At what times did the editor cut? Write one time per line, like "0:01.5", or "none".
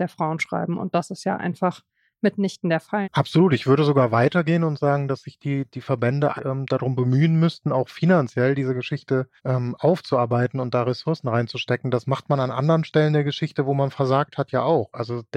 0:03.0
0:06.4
0:09.4